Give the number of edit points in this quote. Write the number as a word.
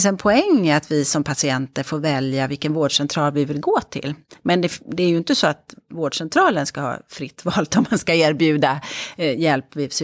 zero